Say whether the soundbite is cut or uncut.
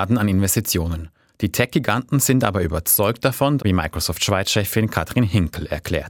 cut